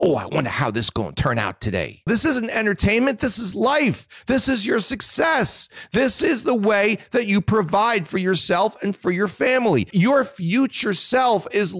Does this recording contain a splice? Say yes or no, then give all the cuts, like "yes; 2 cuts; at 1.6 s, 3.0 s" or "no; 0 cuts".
yes; 1 cut; at 2.1 s